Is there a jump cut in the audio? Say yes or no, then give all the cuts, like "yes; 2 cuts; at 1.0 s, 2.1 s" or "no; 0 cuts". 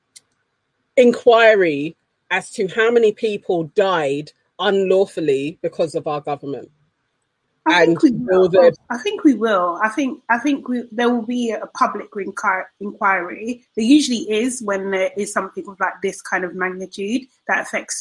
yes; 1 cut; at 8.8 s